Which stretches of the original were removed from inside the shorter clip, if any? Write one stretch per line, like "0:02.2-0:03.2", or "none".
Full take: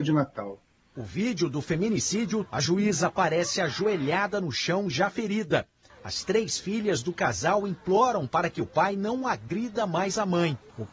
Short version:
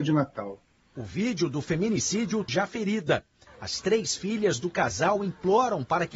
0:02.5-0:04.9